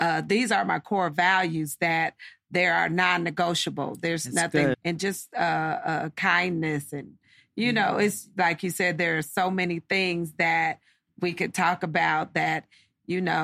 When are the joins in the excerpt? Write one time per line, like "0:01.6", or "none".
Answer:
0:04.7